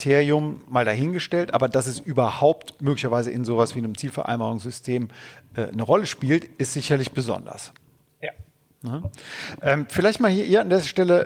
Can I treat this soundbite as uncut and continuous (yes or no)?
yes